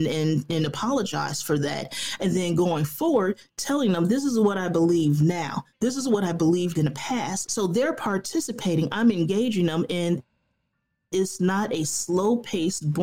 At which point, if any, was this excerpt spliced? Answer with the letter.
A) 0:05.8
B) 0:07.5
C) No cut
B